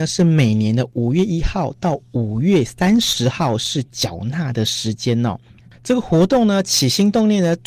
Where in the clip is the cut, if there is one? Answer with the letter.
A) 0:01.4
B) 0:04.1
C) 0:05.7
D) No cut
C